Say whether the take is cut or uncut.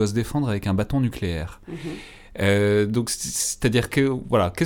uncut